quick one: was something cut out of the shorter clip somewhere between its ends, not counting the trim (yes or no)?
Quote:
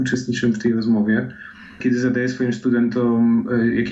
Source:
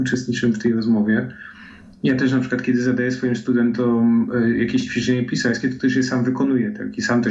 yes